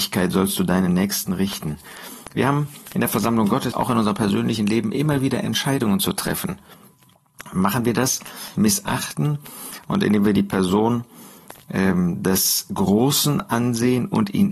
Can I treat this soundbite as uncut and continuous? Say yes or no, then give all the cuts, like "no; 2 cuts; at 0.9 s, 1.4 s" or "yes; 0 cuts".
no; 2 cuts; at 3.7 s, 8.6 s